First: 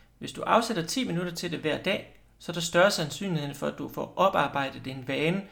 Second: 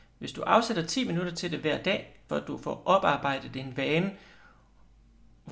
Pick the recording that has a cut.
second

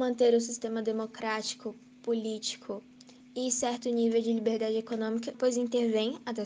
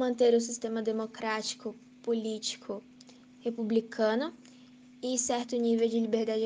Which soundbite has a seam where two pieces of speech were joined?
first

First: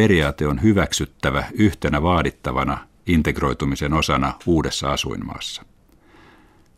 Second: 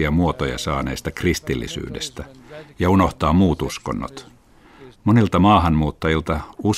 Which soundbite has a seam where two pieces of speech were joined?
second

